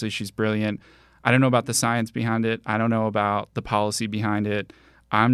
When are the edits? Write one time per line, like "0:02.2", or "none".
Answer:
none